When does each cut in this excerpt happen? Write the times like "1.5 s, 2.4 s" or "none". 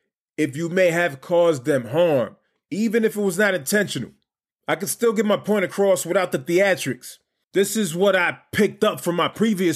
4.5 s, 7.4 s